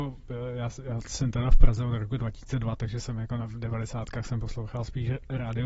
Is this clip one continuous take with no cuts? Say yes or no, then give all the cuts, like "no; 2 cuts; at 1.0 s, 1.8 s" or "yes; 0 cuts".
yes; 0 cuts